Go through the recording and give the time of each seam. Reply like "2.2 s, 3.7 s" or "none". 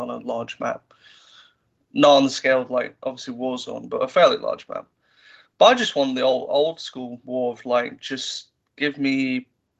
none